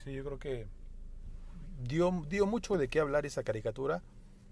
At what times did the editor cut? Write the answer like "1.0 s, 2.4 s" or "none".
none